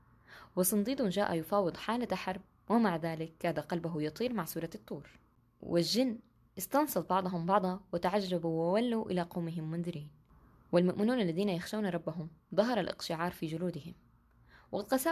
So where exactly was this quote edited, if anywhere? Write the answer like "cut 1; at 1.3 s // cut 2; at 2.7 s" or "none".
none

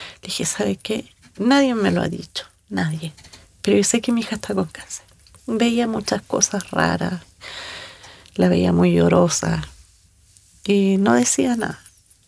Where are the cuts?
none

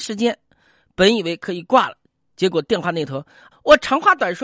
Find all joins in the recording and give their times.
cut 1; at 3.5 s

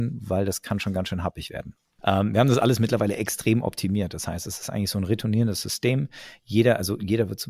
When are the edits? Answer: cut 1; at 2.0 s

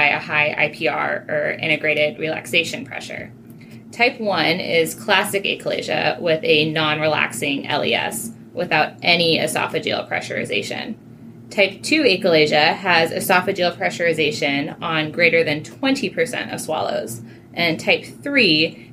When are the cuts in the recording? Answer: none

